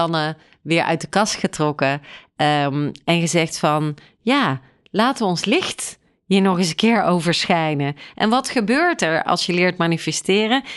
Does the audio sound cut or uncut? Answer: uncut